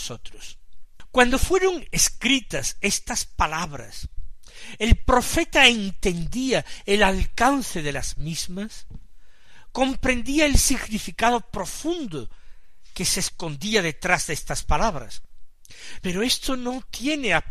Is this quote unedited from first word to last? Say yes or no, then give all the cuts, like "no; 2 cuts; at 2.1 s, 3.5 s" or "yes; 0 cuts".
no; 1 cut; at 16.0 s